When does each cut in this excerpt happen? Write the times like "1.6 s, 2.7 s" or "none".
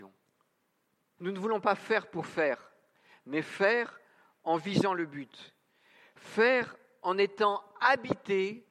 1.2 s